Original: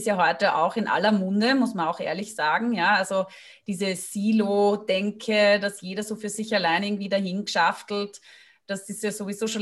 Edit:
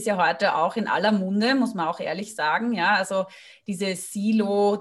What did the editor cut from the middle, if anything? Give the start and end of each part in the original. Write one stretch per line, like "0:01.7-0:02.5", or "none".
none